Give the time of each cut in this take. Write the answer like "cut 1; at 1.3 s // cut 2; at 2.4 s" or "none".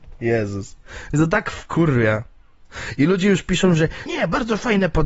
cut 1; at 4.1 s